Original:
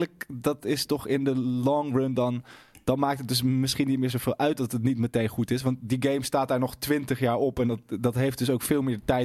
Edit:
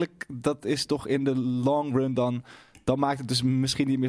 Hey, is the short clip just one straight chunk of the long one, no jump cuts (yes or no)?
yes